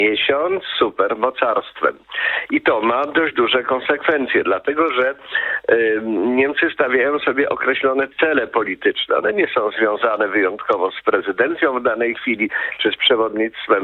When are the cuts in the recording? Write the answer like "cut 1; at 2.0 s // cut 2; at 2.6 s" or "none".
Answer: none